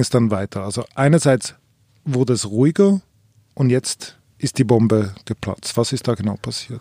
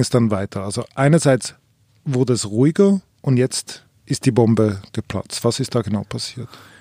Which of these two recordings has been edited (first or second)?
second